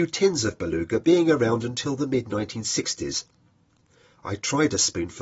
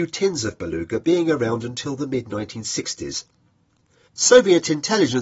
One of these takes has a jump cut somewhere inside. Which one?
second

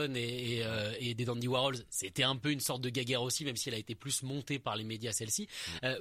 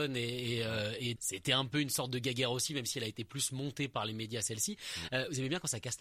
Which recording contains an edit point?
second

